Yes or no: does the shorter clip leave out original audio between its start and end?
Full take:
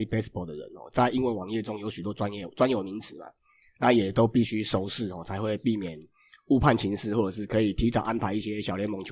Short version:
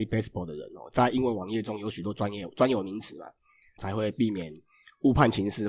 yes